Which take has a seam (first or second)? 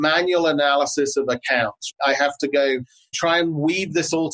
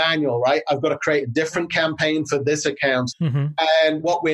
second